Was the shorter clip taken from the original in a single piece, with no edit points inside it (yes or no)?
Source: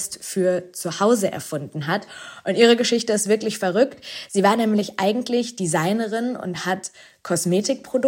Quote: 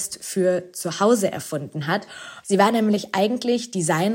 no